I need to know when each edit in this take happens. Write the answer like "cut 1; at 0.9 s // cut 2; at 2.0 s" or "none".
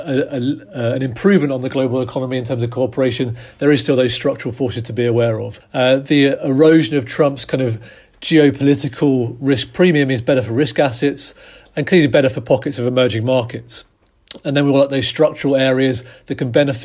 none